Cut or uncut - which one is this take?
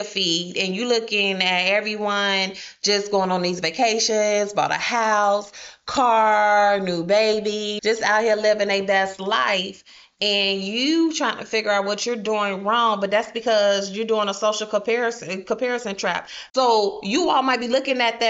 cut